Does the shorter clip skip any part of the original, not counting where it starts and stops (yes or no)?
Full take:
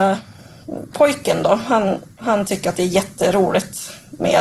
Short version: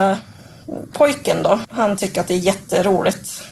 yes